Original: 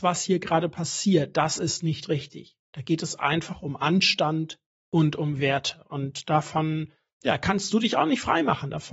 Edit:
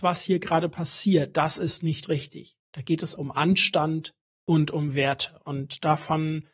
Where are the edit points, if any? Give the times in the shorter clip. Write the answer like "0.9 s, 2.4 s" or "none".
3.2 s

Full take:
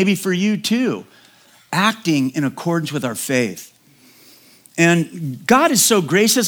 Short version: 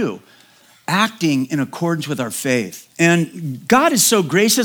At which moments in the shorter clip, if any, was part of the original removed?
2.9 s

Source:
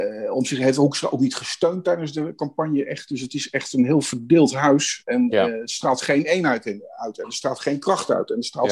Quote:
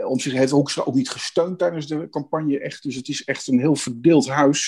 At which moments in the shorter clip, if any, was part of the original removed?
none

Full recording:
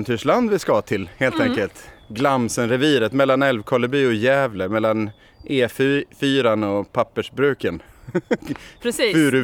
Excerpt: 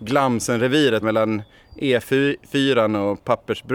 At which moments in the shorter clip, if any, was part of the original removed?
1.0 s

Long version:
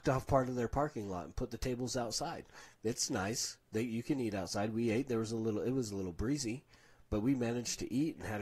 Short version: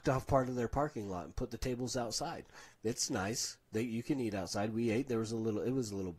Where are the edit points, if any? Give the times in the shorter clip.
none

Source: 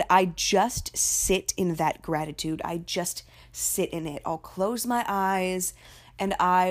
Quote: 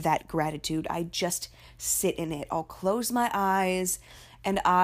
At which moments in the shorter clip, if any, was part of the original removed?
none

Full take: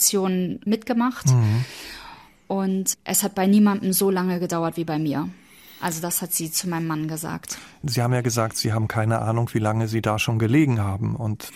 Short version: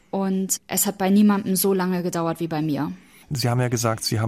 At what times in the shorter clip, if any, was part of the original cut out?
3.2 s

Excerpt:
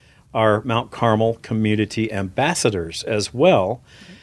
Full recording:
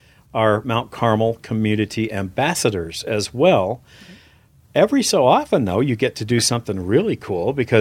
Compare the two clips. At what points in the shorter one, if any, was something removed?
none

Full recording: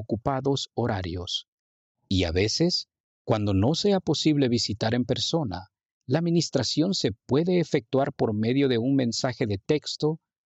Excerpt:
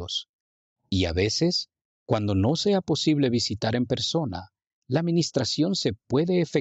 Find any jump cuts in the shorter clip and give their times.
none

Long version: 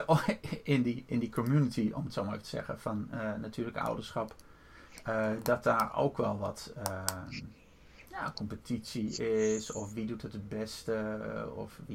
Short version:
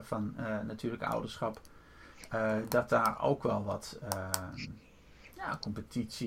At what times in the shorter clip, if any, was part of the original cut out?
none

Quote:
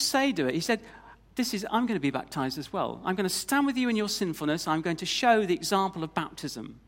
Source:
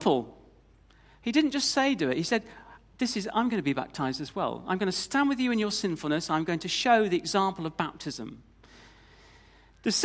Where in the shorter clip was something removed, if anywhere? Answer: none

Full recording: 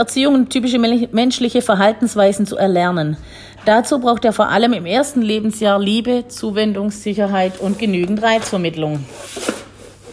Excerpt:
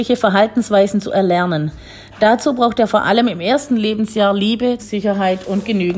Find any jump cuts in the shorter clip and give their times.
4.8 s

